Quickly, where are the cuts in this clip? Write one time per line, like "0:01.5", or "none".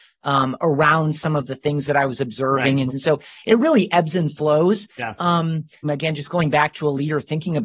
0:02.9
0:05.8